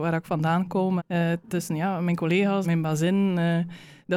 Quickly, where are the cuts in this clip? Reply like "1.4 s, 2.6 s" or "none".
1.0 s, 2.6 s